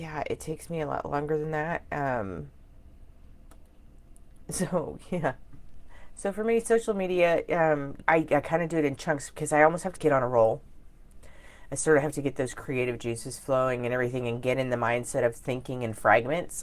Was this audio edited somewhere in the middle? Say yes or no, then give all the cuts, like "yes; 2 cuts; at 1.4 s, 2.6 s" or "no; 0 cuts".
yes; 2 cuts; at 8.0 s, 9.9 s